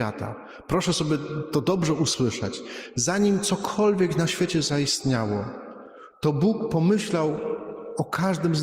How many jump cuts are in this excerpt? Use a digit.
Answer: 0